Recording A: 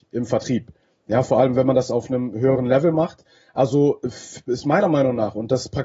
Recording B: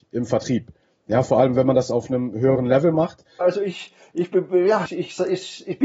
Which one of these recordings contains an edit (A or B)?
B